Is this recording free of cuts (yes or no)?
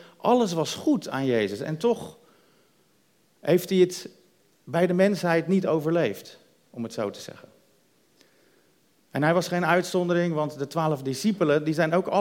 yes